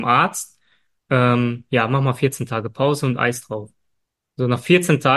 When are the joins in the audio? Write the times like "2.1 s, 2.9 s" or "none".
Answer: none